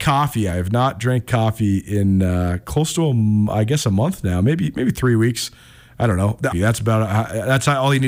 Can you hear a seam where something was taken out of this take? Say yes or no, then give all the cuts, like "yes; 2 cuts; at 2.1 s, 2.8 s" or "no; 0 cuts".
yes; 1 cut; at 6.5 s